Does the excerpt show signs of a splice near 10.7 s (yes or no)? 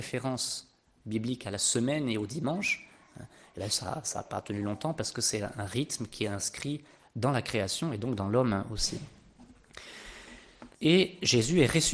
yes